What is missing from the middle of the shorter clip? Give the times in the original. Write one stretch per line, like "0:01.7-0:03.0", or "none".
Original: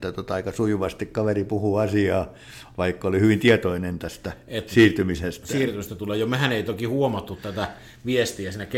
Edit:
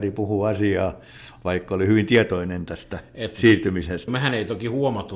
0:05.4-0:06.3

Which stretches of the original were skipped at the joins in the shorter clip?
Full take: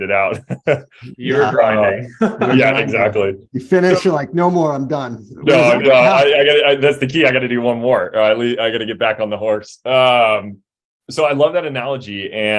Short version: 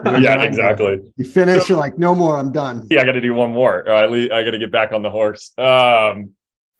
0:05.3-0:07.2

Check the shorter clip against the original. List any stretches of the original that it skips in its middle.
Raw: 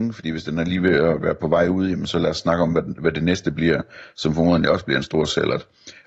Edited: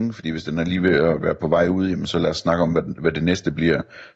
none

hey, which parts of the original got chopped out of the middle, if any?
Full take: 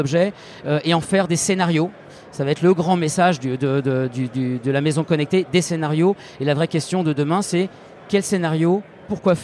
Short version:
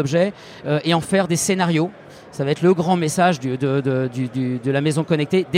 none

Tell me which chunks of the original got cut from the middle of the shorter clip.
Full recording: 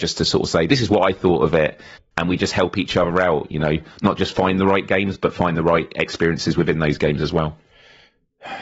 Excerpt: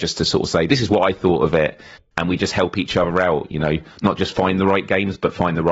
none

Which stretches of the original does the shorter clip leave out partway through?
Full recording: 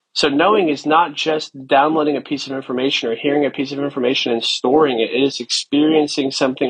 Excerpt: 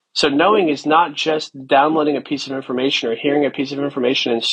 none

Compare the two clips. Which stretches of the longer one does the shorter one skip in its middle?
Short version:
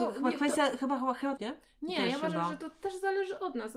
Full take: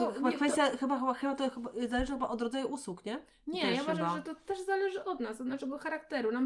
0:01.4-0:03.0

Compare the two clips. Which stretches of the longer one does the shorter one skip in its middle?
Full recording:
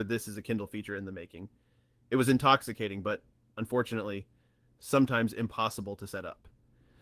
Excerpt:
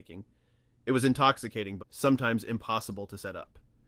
0:03.0-0:04.7

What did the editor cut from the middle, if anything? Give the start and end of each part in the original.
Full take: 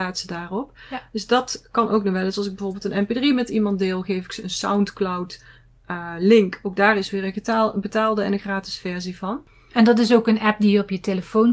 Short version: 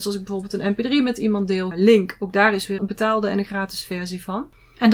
0:04.0-0:06.1
0:07.2-0:07.7

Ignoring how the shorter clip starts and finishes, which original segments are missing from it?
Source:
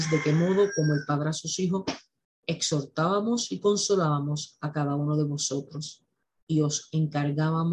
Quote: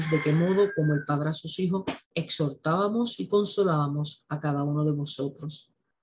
0:02.1-0:02.4

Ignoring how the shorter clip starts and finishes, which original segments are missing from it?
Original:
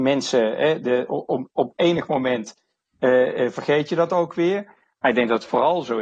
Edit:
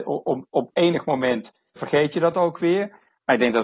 0:02.8-0:03.5

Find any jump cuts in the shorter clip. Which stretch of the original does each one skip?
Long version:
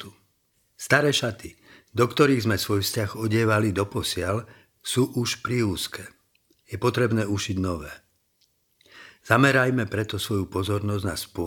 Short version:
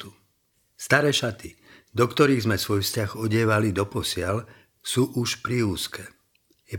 none

